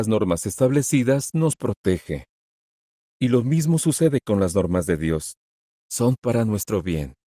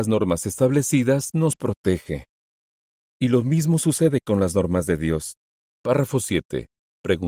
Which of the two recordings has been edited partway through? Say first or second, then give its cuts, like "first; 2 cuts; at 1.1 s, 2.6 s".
second; 1 cut; at 5.6 s